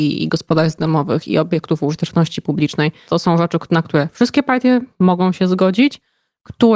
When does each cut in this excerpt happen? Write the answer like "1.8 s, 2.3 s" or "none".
3.1 s, 4.9 s